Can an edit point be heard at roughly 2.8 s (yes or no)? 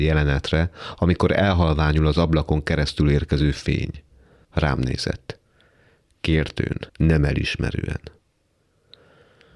no